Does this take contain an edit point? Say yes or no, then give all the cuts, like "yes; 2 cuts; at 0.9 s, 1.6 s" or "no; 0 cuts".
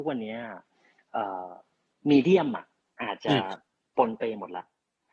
no; 0 cuts